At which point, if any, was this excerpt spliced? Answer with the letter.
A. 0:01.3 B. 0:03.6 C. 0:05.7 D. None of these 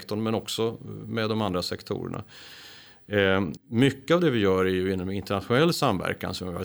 B